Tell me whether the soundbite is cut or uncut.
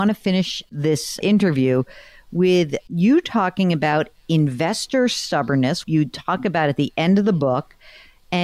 cut